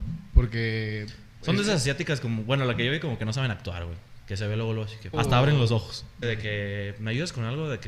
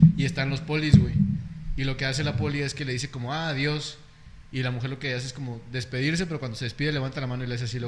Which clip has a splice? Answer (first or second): first